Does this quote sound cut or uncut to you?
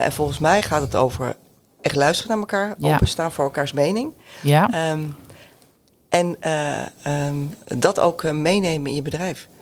uncut